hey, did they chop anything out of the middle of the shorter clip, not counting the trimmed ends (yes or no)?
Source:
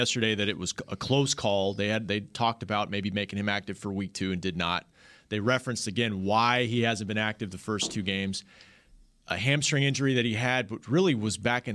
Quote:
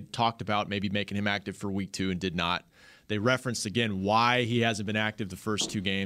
no